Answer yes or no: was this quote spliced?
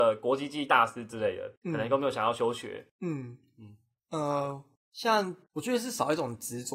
no